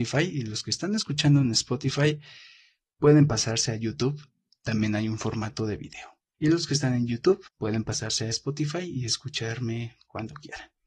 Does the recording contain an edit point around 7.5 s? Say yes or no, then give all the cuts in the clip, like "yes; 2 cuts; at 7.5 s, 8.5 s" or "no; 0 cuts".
yes; 2 cuts; at 6.3 s, 7.5 s